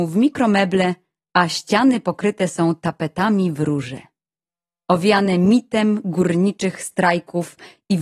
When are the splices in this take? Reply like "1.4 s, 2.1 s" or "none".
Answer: 4.8 s